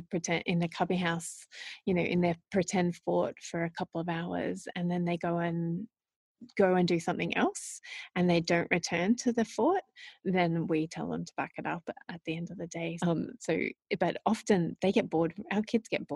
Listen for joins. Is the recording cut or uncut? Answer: cut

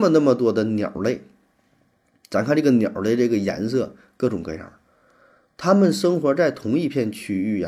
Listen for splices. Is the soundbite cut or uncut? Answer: uncut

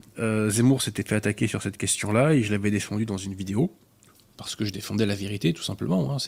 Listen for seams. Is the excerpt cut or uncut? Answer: uncut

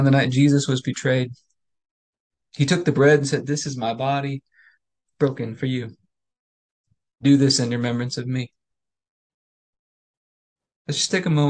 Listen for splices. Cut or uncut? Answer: uncut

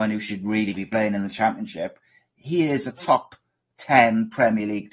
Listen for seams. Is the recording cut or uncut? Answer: uncut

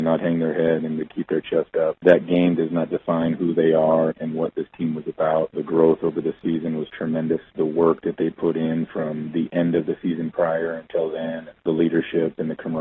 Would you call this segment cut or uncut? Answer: uncut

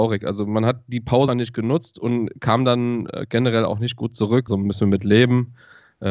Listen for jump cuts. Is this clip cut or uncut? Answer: cut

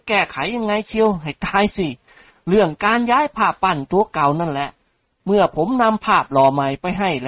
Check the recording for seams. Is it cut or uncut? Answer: uncut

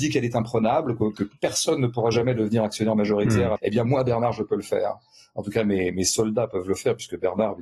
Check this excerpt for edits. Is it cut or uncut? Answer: cut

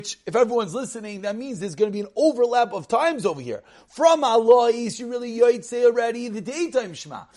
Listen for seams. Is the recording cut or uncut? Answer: uncut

